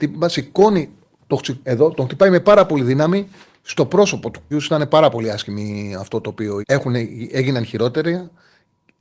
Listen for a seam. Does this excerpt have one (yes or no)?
yes